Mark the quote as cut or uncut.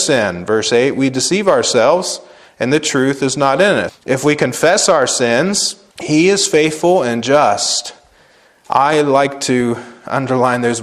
cut